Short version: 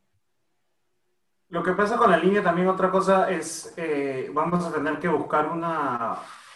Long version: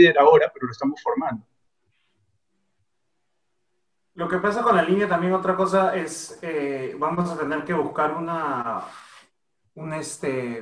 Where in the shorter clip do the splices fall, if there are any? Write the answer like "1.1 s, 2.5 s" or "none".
none